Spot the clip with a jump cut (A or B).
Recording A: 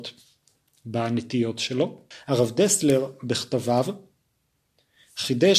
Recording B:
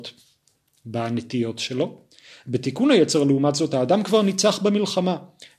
A